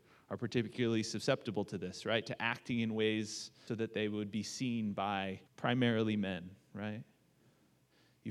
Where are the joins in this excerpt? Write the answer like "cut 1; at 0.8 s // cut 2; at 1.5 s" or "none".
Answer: cut 1; at 3.7 s // cut 2; at 5.5 s